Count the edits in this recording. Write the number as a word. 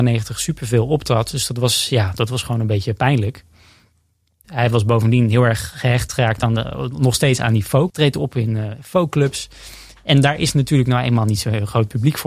two